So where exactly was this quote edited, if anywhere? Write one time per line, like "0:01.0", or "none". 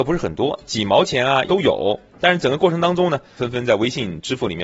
0:01.4
0:03.4

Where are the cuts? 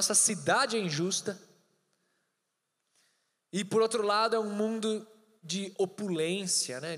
none

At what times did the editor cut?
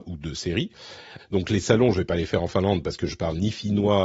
0:01.2

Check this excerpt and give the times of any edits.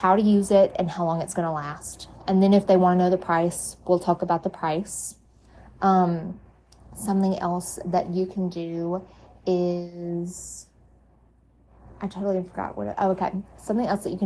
none

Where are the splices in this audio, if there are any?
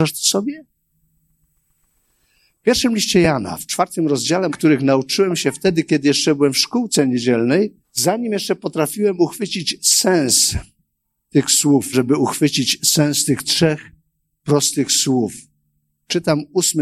0:04.5
0:07.8
0:11.9

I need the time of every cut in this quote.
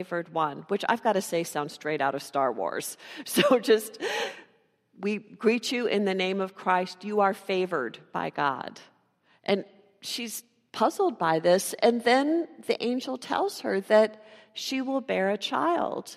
none

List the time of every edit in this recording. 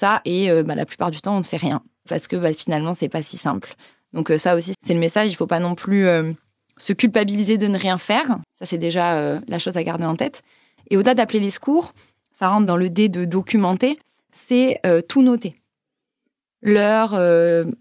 0:04.7
0:08.4

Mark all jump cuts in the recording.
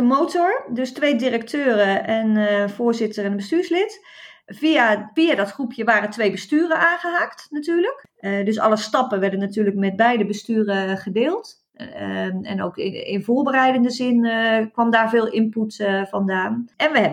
none

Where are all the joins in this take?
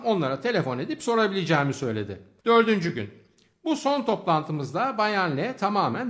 0:02.4

